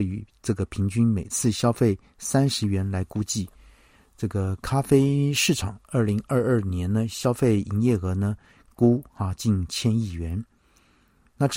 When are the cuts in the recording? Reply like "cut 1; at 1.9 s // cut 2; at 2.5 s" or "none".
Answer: none